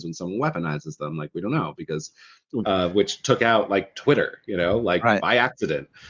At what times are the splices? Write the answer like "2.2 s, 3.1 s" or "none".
2.6 s